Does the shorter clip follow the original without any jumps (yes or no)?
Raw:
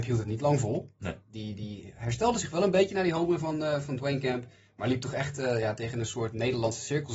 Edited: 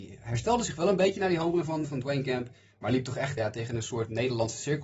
no